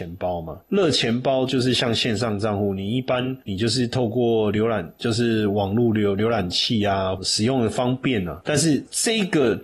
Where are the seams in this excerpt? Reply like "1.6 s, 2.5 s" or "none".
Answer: 7.2 s